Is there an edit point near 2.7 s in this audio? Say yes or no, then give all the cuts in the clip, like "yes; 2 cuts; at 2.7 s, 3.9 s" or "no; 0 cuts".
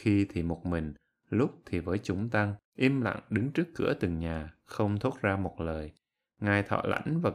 yes; 1 cut; at 2.7 s